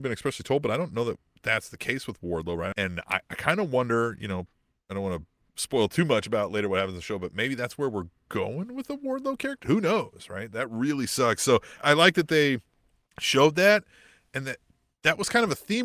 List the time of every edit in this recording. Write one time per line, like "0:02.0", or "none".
0:02.7
0:09.6
0:11.8